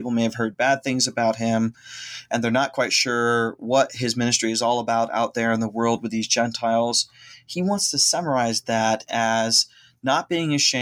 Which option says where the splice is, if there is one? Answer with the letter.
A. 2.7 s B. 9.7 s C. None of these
C